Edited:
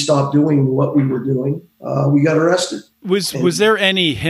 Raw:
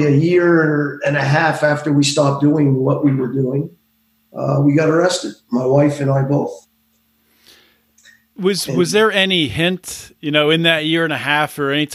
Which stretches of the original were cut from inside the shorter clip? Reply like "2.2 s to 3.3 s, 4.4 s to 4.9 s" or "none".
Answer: 3.8 s to 4.2 s, 5.4 s to 8.3 s